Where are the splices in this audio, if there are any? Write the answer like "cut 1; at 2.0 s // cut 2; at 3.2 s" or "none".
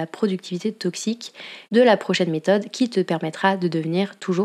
cut 1; at 1.6 s